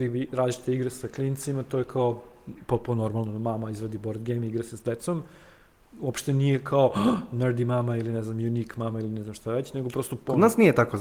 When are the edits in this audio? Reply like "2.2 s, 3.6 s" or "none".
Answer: none